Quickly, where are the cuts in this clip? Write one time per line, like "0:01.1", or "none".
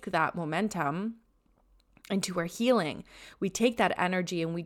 none